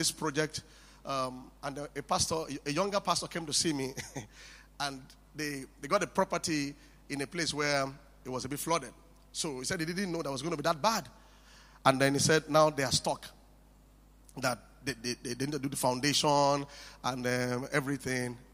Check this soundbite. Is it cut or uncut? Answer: uncut